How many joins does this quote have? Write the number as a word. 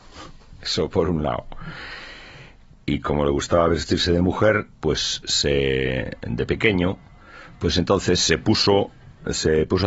zero